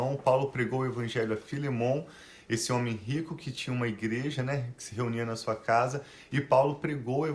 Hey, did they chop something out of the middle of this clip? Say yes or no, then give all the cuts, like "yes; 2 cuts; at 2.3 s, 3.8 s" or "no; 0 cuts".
no; 0 cuts